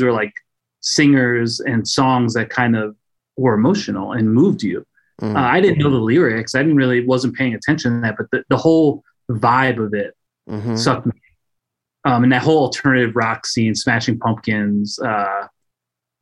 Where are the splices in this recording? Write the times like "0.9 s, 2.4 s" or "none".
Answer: none